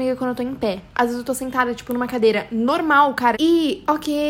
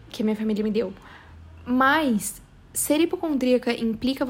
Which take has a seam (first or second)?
first